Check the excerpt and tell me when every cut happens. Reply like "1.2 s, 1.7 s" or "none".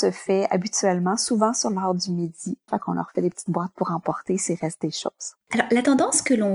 2.7 s, 5.4 s